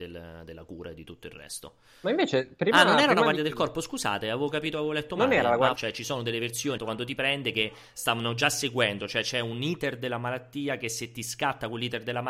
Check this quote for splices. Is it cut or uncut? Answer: cut